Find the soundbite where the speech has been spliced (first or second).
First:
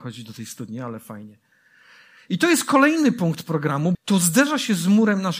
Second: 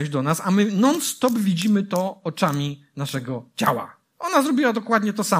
first